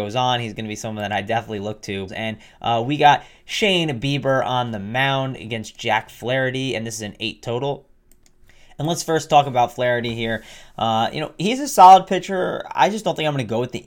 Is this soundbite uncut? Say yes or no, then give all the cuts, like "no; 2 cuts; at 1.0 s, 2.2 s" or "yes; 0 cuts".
no; 1 cut; at 2.1 s